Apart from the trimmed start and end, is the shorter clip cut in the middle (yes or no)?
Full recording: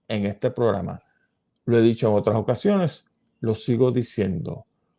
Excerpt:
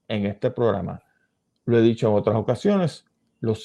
no